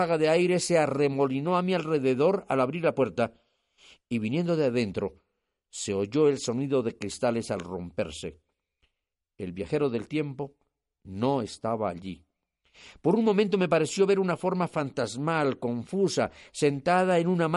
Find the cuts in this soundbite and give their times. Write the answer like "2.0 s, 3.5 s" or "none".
none